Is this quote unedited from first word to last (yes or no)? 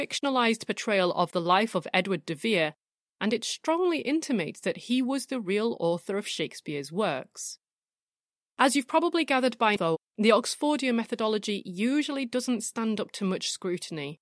no